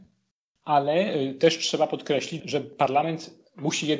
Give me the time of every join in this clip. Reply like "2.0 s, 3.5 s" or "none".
2.4 s